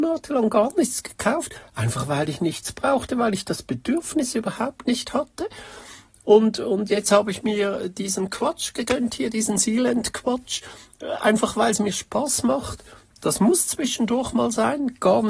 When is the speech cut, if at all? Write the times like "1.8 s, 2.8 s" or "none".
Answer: none